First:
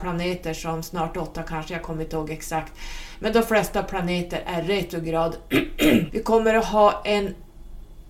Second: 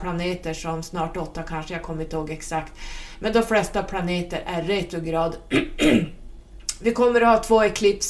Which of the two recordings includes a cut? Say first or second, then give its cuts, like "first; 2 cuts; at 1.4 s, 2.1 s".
first; 1 cut; at 6.1 s